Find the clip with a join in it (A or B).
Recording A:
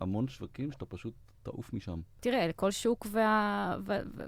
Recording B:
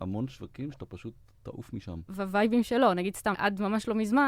B